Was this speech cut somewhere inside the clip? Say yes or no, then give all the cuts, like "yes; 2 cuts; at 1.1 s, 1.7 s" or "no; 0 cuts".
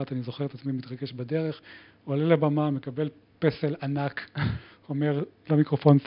no; 0 cuts